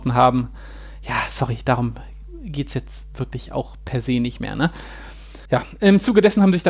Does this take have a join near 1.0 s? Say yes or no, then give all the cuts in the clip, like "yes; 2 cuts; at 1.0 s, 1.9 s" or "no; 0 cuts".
no; 1 cut; at 5.5 s